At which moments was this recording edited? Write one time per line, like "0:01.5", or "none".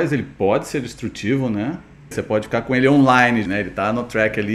0:02.1
0:03.5